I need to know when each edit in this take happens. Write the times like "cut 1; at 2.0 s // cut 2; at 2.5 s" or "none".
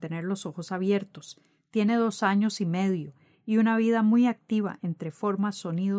none